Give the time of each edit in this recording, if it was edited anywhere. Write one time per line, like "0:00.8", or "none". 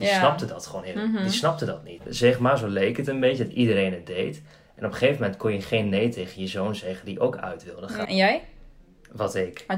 0:02.0
0:08.1

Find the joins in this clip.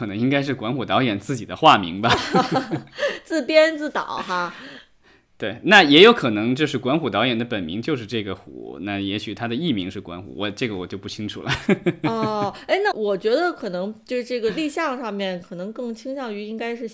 0:12.9

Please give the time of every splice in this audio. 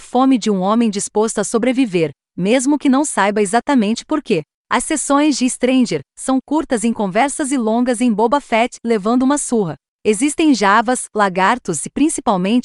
0:06.1

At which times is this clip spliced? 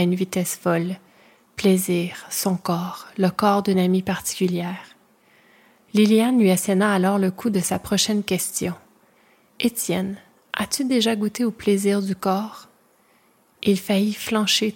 none

